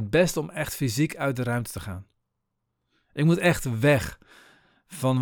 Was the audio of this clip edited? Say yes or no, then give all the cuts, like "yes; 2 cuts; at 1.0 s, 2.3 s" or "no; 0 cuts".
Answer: no; 0 cuts